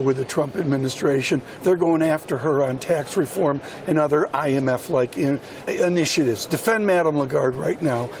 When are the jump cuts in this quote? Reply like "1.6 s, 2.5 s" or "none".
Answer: 5.6 s